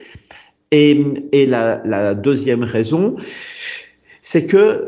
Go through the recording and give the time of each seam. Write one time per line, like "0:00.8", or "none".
none